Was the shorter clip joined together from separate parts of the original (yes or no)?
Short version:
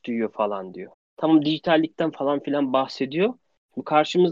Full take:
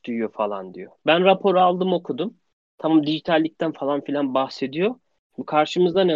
yes